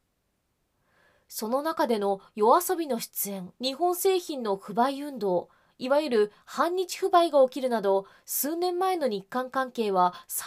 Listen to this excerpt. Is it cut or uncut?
cut